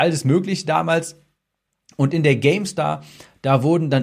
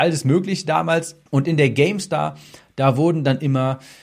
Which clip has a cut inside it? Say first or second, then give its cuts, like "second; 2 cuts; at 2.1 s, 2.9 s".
second; 1 cut; at 1.3 s